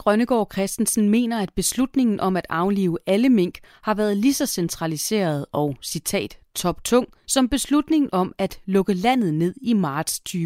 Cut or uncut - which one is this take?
uncut